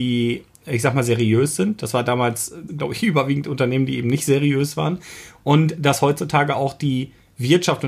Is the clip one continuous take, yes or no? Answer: no